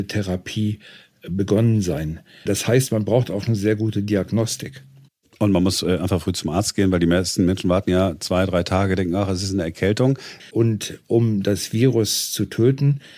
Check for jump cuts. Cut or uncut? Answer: cut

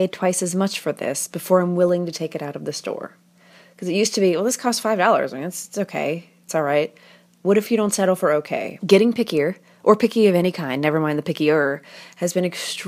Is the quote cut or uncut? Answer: cut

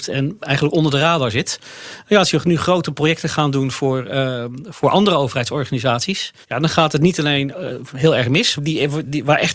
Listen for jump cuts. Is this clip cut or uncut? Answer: cut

